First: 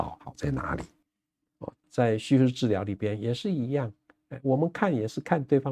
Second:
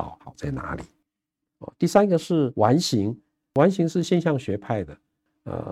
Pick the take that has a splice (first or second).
first